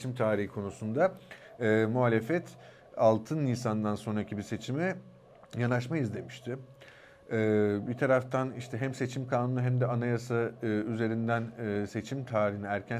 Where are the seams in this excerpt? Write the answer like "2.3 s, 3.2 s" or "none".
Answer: none